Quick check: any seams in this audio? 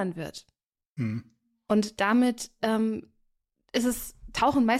no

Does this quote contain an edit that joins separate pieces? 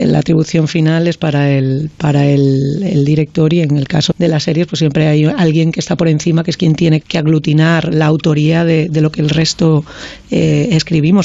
yes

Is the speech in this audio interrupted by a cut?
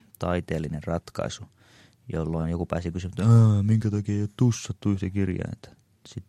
no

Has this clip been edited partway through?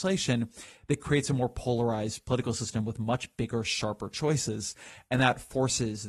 no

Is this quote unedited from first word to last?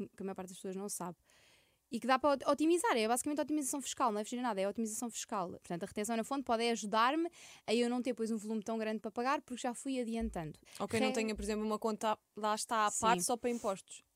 no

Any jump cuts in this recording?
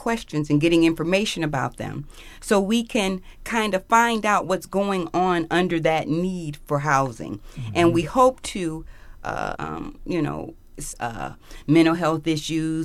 yes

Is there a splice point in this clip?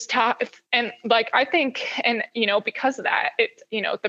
no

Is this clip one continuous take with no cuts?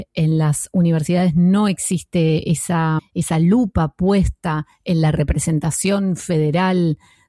no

